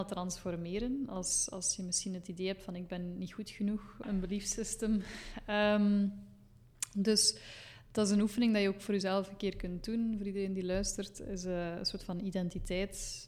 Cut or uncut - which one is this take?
cut